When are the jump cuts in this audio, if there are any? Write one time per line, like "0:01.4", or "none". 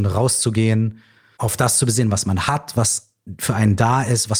0:01.3